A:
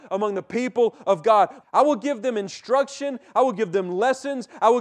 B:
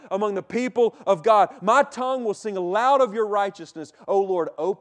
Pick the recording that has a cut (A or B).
A